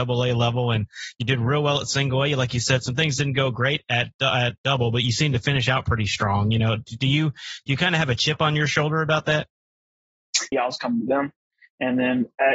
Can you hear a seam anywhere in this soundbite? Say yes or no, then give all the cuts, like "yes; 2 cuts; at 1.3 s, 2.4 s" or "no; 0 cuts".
yes; 1 cut; at 10.5 s